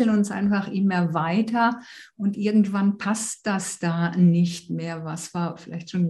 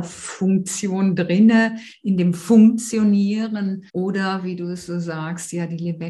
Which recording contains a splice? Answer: second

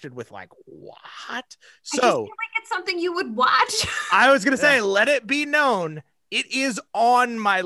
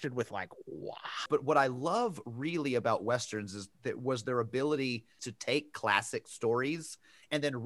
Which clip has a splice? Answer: second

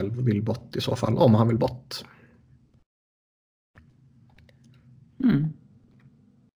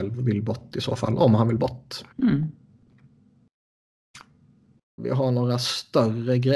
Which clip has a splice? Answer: second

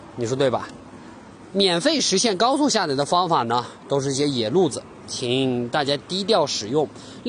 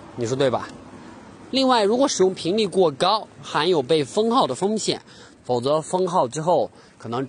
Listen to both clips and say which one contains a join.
second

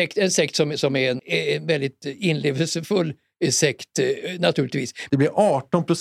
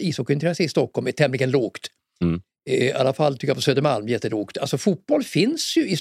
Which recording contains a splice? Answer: first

